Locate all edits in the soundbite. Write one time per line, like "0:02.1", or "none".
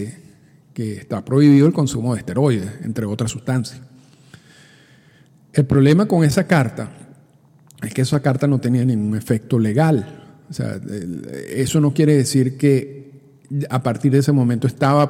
none